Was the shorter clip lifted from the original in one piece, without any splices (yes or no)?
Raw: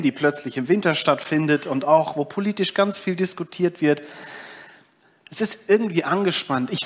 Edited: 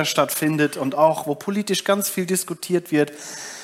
yes